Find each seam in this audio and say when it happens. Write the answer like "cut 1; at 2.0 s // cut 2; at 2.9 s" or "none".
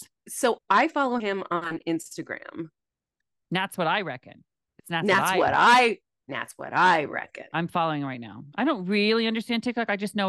cut 1; at 8.5 s